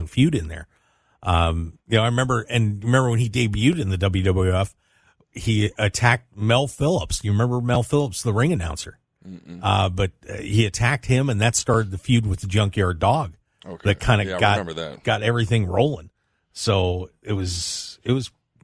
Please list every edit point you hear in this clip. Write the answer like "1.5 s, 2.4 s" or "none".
none